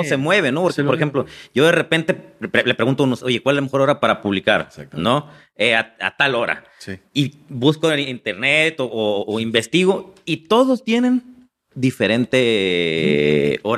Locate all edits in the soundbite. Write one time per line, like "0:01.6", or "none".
none